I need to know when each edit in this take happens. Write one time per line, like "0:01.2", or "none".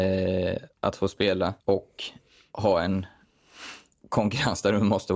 0:01.6